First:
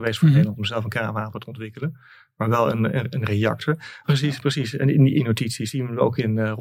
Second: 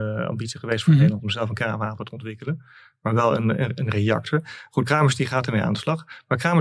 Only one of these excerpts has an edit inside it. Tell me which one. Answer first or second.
first